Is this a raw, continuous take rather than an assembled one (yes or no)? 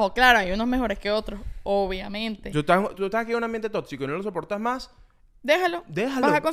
no